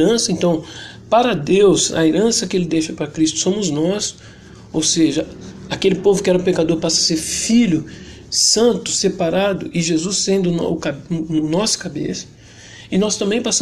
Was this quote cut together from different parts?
no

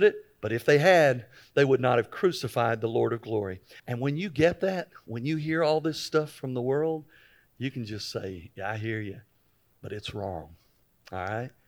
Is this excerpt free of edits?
no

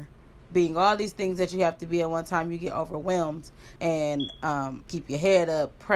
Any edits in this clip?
yes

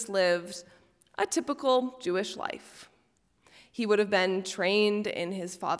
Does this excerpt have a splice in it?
no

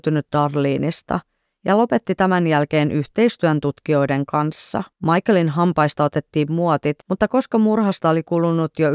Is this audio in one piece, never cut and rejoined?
no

